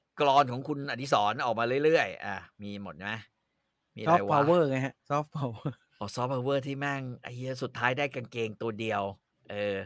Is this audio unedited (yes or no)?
yes